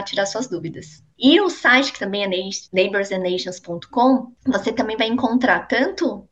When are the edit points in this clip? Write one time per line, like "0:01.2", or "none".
0:01.2